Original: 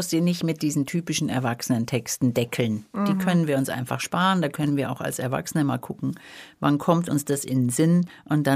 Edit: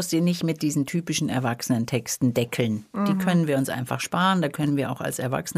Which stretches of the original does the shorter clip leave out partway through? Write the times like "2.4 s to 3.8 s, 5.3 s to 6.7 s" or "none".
none